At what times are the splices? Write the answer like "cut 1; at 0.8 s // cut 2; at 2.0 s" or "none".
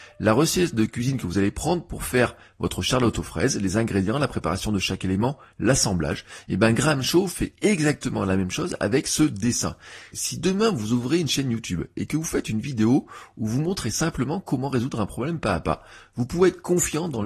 cut 1; at 10.1 s